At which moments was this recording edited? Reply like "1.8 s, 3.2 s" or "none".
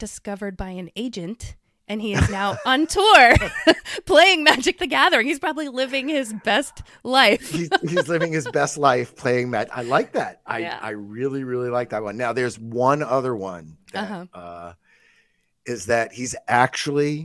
none